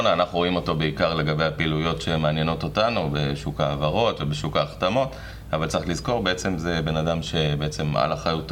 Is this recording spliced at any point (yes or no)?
no